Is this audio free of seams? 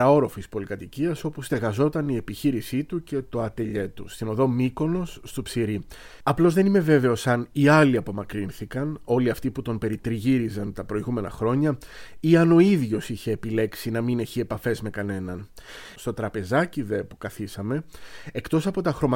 no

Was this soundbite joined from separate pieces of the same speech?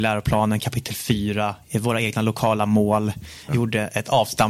yes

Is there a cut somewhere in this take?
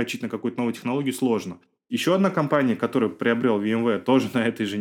yes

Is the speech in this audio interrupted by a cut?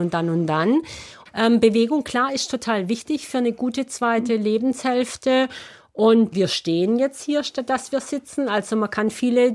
yes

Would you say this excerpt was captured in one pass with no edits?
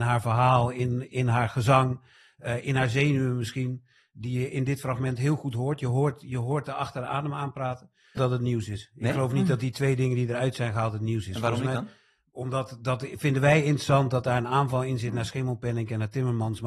no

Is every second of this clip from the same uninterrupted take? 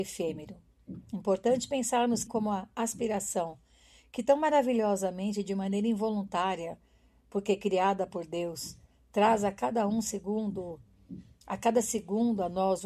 no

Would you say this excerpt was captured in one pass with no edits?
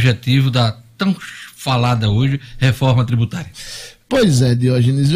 yes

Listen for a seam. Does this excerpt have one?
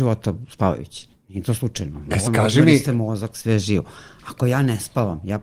yes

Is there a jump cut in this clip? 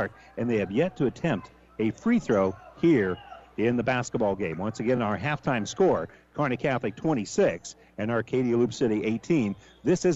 no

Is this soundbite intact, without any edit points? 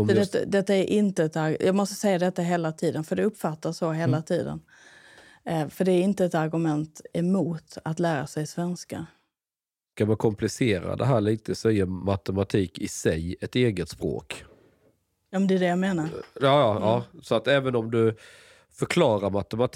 yes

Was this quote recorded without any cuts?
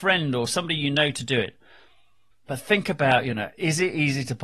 no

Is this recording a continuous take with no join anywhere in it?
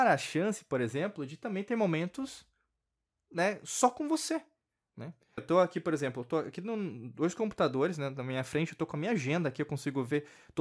no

